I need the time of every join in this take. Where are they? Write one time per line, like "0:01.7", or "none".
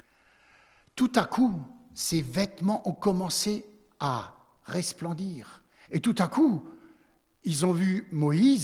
0:05.8